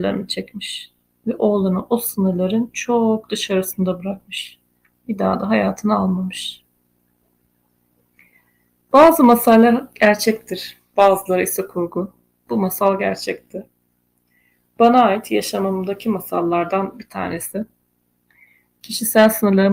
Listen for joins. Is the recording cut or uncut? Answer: uncut